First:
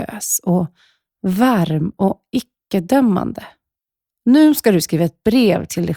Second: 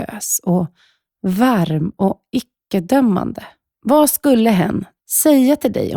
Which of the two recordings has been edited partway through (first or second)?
second